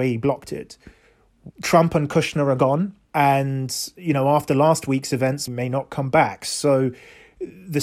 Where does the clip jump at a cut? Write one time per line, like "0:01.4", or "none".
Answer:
0:01.5
0:03.0
0:05.5

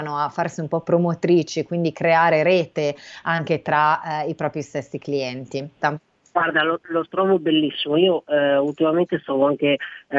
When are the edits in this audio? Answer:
0:05.8

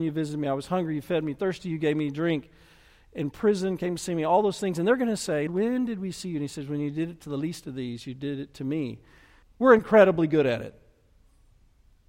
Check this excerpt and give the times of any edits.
0:05.5
0:09.4

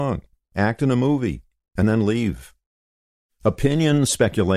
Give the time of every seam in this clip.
none

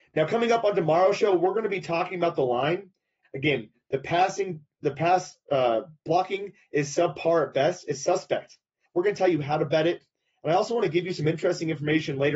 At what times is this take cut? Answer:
0:03.2
0:08.9

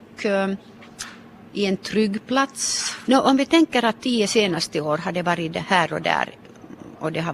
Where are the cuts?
0:03.0

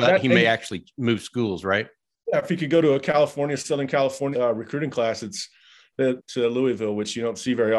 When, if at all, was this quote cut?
0:04.3
0:06.2

